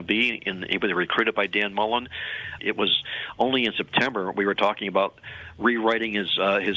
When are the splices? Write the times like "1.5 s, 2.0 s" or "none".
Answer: 2.6 s